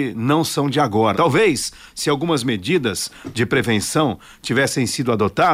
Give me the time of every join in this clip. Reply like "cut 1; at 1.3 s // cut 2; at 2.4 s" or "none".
cut 1; at 1.1 s

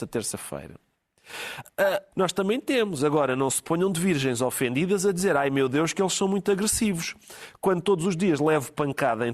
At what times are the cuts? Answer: cut 1; at 2.1 s

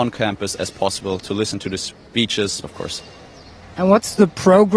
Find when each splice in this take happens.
cut 1; at 2.6 s

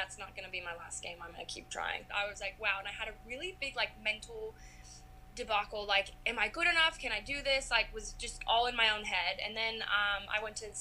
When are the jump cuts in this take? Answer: cut 1; at 2.1 s

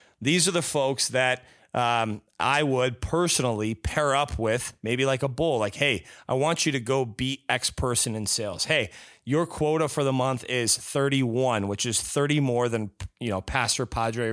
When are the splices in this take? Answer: none

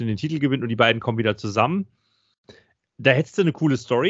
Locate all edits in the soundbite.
none

